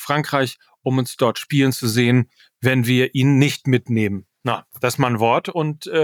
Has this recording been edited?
no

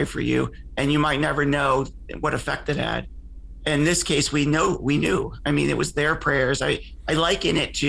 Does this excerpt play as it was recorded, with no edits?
yes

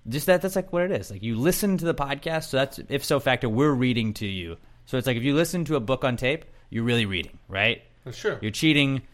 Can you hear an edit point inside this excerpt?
no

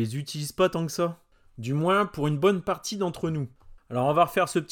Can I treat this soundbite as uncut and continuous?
no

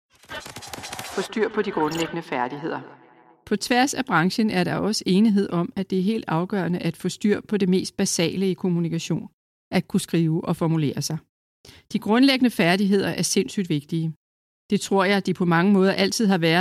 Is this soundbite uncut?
yes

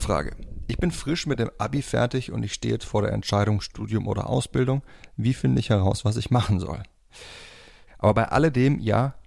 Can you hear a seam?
yes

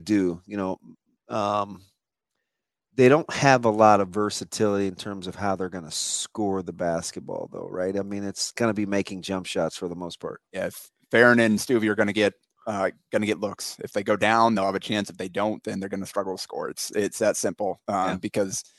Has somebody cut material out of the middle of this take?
yes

